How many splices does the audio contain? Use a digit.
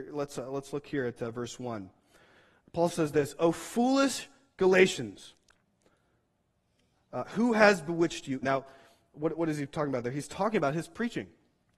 1